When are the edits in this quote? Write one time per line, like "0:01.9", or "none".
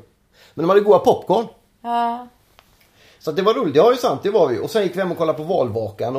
none